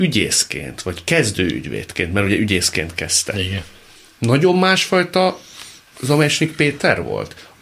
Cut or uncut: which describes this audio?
uncut